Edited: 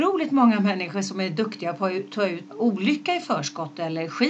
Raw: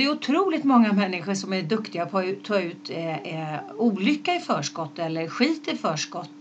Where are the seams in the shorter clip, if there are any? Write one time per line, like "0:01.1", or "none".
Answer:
0:02.5